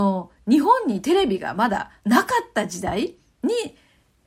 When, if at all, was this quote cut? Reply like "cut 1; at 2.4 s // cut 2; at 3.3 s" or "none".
cut 1; at 2.0 s